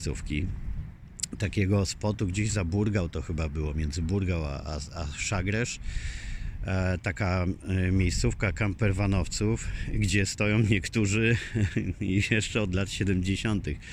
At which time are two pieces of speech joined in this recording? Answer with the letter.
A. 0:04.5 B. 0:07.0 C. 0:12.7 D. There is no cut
D